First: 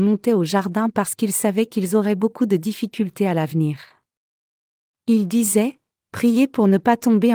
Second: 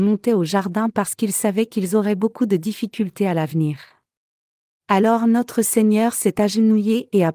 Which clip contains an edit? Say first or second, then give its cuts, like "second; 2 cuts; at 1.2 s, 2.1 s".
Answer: second; 1 cut; at 4.8 s